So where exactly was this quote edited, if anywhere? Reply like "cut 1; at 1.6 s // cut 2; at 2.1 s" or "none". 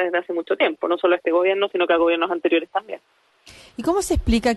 none